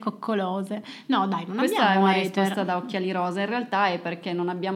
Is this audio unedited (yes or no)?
yes